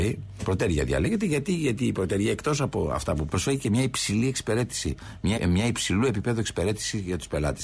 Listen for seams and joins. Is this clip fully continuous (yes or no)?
no